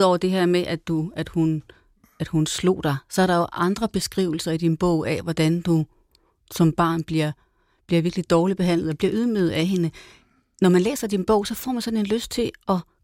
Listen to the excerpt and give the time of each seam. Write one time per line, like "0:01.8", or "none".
none